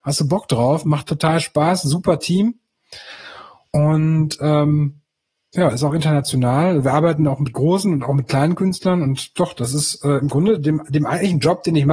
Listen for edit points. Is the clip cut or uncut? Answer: uncut